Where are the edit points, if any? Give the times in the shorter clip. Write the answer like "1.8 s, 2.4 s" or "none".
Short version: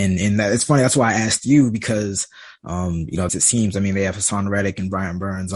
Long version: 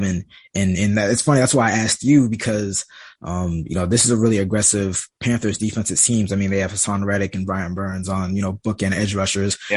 3.3 s